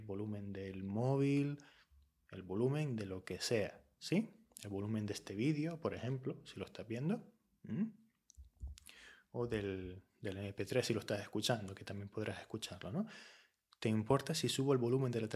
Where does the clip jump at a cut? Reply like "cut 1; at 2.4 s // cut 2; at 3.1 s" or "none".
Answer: none

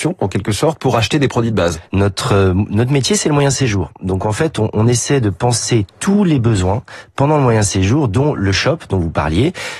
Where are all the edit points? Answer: cut 1; at 1.8 s

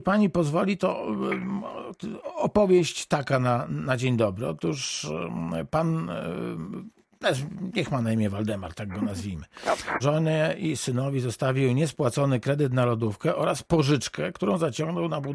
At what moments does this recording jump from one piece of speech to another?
cut 1; at 10.0 s

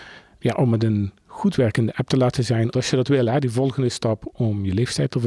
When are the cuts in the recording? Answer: cut 1; at 2.7 s

